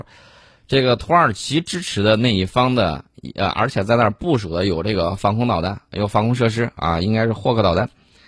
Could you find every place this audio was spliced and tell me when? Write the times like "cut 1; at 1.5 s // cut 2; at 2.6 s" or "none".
none